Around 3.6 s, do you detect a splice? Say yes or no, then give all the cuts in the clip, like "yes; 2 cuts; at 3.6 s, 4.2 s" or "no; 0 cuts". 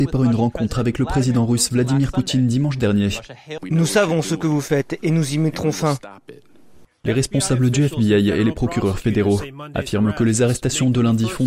yes; 1 cut; at 3.6 s